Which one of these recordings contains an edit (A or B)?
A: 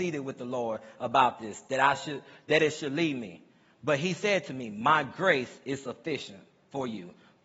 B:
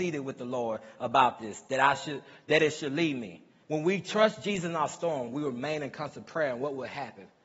B